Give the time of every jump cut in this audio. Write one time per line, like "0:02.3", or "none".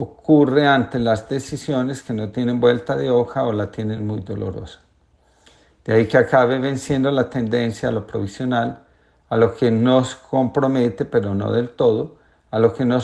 none